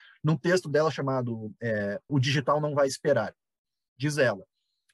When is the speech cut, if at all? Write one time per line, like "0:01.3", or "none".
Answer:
0:02.1